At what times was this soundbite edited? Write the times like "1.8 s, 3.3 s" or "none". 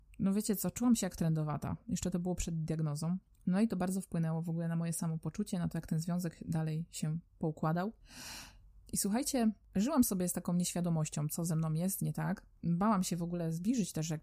8.9 s